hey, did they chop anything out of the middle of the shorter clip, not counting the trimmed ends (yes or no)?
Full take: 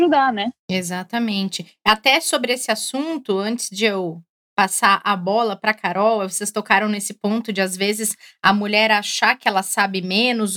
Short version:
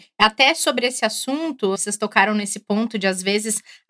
yes